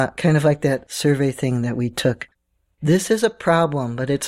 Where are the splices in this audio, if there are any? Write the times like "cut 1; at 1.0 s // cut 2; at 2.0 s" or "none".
cut 1; at 2.7 s